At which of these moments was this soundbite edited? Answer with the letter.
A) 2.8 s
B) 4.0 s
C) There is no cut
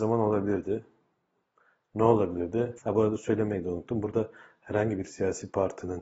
A